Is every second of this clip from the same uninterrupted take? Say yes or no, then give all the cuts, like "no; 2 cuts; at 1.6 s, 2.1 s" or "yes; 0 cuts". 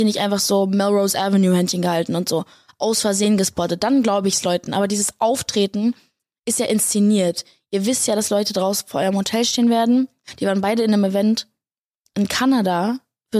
yes; 0 cuts